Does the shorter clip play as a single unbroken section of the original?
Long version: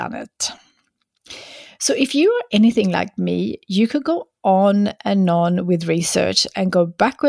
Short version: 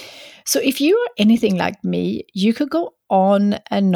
yes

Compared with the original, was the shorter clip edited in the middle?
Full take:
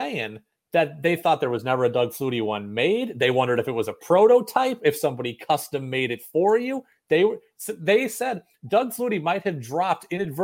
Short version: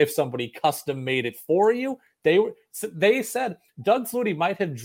no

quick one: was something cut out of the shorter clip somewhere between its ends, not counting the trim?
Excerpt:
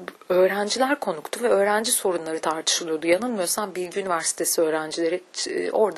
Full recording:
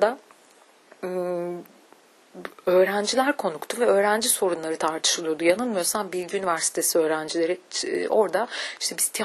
no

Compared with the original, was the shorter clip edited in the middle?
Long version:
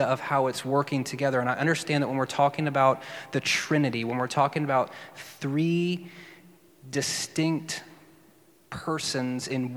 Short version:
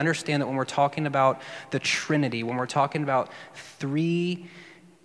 no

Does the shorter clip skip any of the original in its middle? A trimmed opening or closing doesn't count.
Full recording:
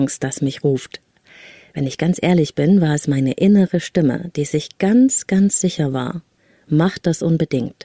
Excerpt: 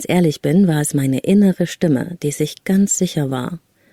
yes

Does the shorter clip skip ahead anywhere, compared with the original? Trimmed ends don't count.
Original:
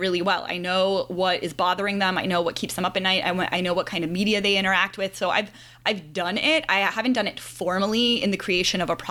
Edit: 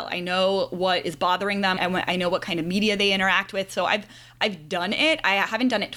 yes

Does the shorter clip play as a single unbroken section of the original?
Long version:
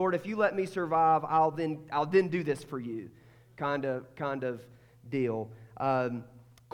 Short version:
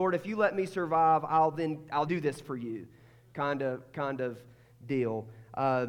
no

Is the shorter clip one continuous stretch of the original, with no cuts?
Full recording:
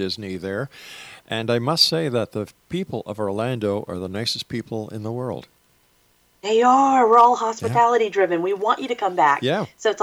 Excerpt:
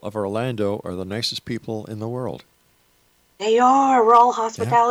yes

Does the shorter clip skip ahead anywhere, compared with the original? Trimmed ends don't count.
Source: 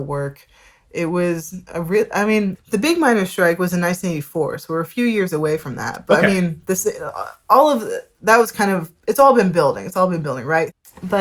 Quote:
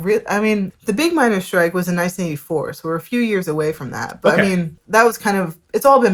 yes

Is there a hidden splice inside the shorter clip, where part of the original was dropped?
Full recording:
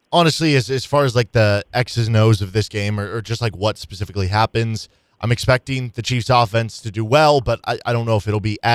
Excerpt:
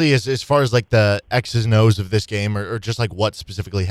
no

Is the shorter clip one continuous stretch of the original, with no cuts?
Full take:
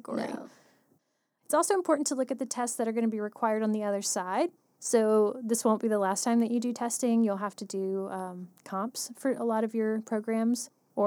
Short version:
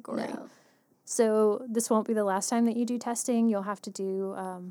no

